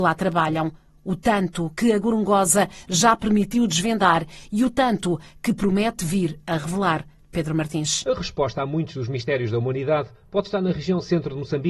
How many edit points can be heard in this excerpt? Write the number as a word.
zero